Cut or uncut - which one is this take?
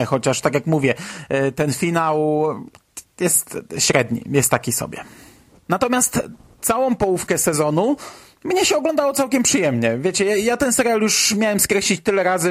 uncut